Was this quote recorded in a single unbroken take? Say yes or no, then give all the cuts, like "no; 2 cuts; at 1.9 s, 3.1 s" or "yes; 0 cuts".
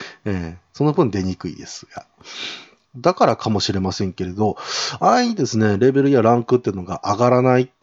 no; 1 cut; at 2.8 s